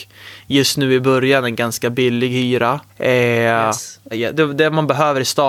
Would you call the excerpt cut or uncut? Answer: cut